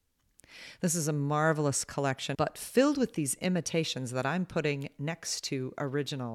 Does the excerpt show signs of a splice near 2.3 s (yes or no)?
yes